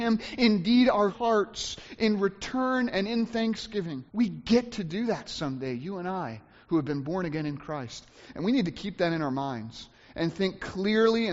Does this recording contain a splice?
yes; 2 cuts; at 1.1 s, 4.1 s

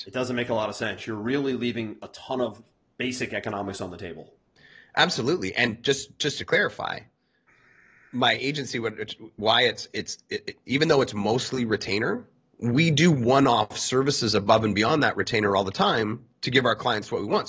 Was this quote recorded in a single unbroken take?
yes; 0 cuts

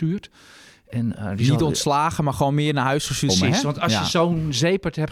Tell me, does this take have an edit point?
yes; 1 cut; at 3.3 s

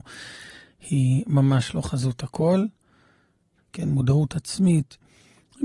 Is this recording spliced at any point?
yes; 1 cut; at 3.6 s

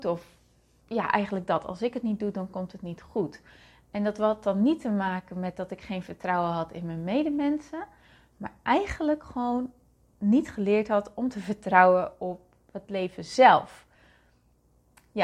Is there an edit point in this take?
no; 0 cuts

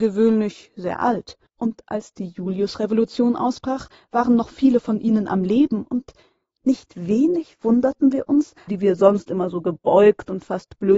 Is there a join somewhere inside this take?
yes; 2 cuts; at 1.5 s, 8.7 s

